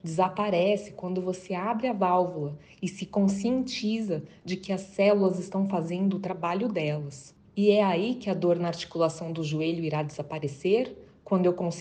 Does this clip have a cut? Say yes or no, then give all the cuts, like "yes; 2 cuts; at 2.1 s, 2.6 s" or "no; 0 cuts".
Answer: yes; 1 cut; at 7.5 s